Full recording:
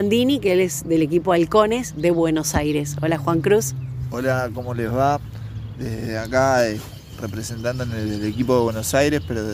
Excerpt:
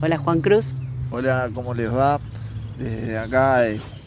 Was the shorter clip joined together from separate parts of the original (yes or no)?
no